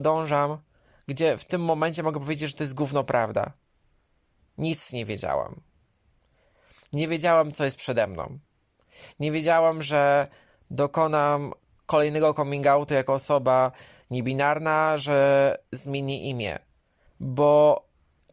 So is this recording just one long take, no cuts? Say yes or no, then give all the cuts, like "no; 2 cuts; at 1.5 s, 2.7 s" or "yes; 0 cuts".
no; 1 cut; at 17.1 s